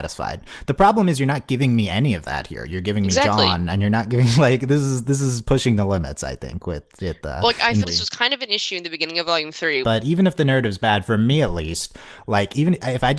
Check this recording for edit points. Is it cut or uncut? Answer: cut